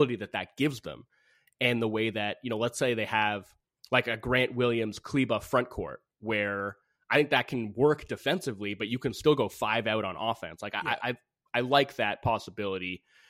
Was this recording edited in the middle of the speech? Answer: no; 0 cuts

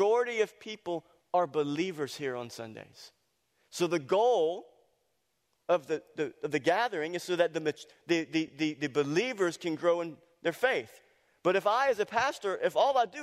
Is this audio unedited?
yes; 0 cuts

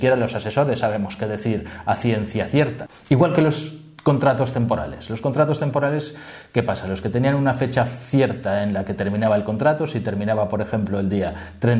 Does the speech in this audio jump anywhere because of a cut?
no; 0 cuts

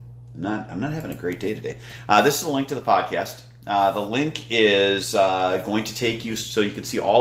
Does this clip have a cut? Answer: no; 0 cuts

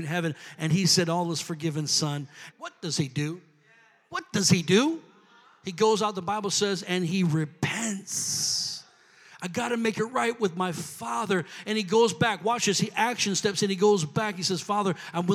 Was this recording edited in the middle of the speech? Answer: yes; 1 cut; at 2.5 s

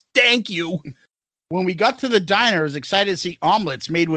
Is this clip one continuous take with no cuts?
no; 1 cut; at 1.4 s

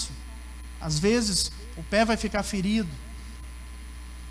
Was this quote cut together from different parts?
no; 0 cuts

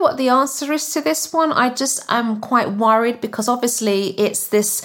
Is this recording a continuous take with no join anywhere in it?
yes; 0 cuts

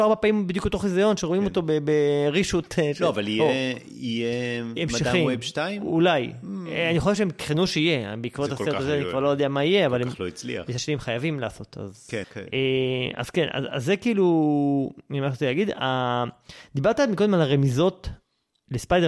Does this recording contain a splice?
yes; 1 cut; at 12.2 s

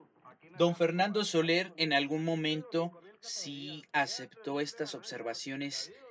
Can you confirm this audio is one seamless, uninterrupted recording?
yes; 0 cuts

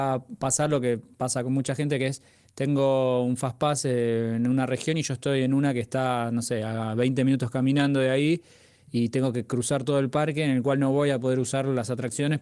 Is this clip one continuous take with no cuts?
yes; 0 cuts

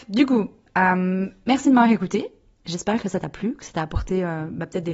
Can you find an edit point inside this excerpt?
no; 0 cuts

